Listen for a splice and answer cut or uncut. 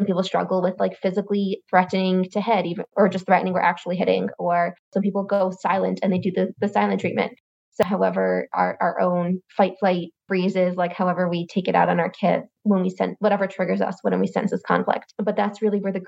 uncut